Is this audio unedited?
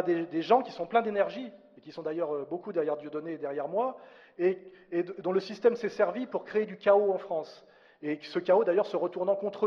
yes; 0 cuts

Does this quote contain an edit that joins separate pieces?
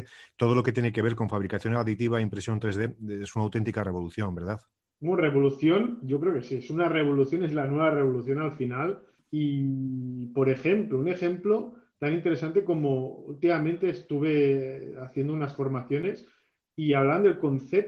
no; 0 cuts

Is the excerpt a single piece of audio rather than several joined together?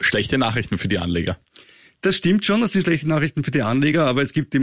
yes; 0 cuts

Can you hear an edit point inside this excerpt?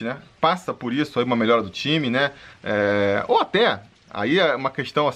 yes; 1 cut; at 2.5 s

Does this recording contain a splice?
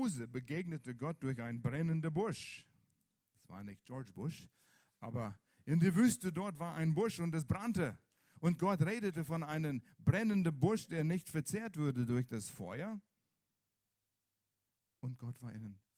no; 0 cuts

